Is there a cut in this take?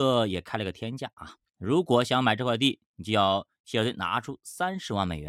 no; 0 cuts

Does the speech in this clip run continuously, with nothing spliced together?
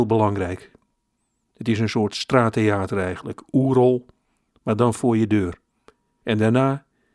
no; 1 cut; at 6.2 s

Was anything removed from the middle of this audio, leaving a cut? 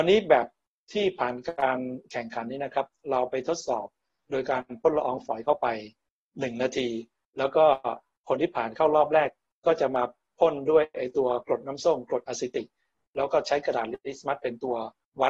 no; 0 cuts

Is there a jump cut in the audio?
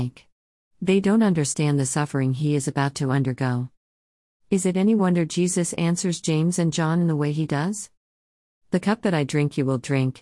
no; 0 cuts

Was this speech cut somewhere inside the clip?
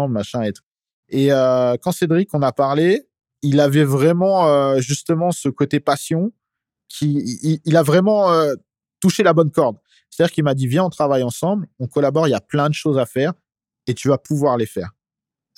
no; 0 cuts

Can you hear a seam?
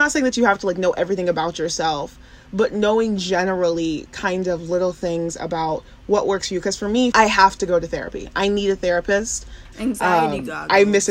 yes; 2 cuts; at 7.1 s, 9.7 s

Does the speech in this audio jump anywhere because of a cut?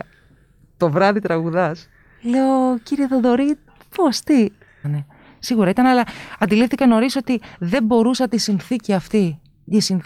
yes; 1 cut; at 4.8 s

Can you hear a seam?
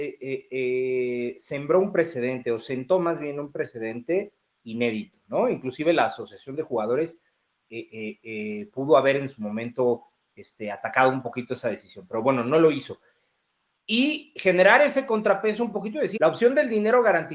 yes; 2 cuts; at 13.8 s, 16.2 s

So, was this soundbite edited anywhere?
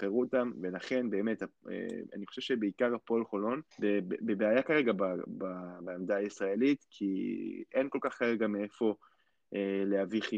yes; 1 cut; at 3.7 s

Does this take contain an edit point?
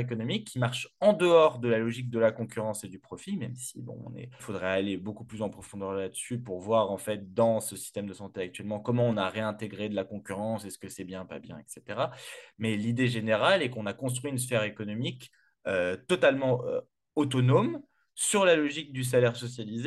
yes; 1 cut; at 4.4 s

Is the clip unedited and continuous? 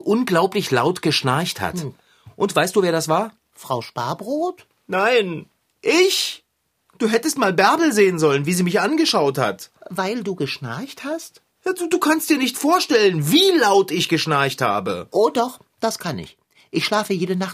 yes; 0 cuts

